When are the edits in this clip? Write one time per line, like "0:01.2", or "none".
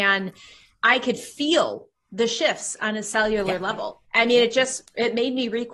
0:04.0